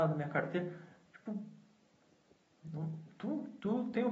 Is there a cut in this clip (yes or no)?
no